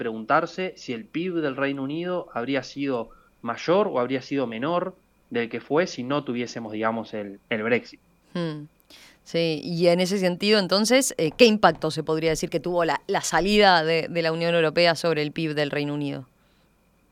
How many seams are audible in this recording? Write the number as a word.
zero